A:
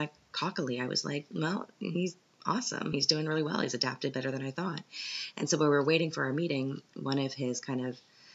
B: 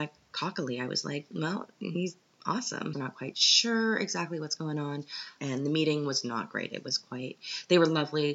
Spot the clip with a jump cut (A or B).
B